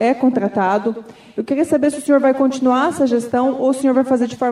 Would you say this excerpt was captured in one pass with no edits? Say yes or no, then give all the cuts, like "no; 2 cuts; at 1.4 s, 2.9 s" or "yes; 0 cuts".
yes; 0 cuts